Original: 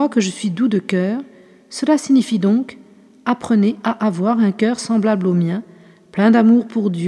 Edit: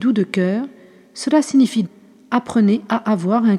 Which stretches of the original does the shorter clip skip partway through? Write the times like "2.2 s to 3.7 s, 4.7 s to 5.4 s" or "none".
2.4 s to 2.8 s